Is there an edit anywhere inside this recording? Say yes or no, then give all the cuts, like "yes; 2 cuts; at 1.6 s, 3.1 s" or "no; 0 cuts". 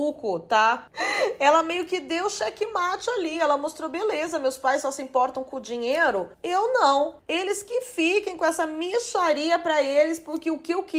no; 0 cuts